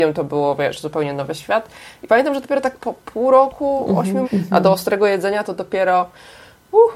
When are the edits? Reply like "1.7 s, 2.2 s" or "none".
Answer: 4.2 s